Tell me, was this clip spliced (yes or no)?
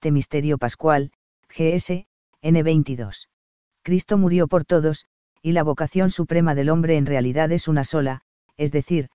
yes